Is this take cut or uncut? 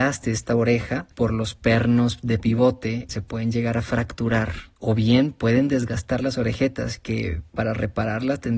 cut